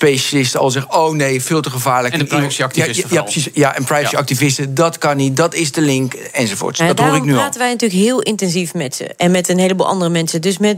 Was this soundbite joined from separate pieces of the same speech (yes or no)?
no